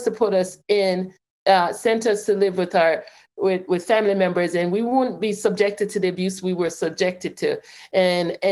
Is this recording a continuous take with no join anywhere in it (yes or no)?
yes